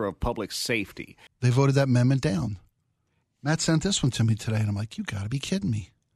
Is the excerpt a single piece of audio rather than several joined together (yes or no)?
no